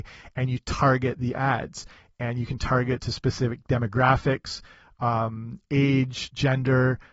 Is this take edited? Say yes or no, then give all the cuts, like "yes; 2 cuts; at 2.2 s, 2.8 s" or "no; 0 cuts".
no; 0 cuts